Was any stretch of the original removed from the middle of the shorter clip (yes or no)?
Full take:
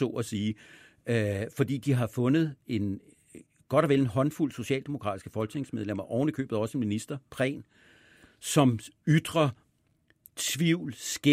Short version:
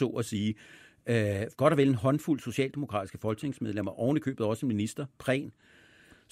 yes